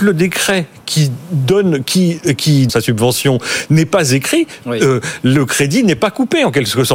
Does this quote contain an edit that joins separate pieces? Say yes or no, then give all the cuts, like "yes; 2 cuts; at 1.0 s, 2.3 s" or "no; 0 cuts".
yes; 1 cut; at 2.7 s